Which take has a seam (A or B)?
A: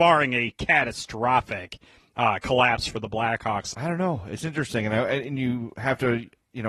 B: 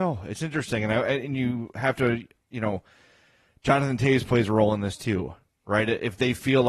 A